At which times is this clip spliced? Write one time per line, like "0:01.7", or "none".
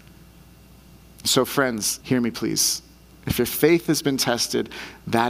0:02.0